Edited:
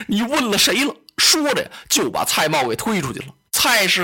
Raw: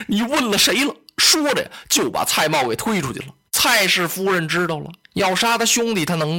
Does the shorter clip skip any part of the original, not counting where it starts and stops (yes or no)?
no